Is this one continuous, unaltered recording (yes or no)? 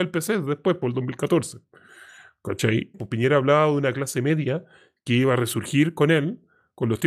no